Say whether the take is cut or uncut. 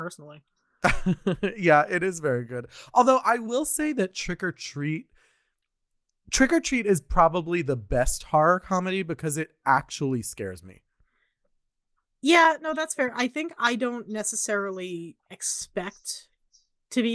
uncut